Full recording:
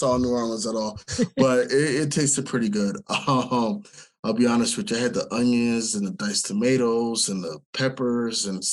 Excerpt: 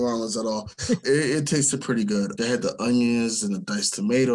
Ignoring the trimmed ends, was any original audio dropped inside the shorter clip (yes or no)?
yes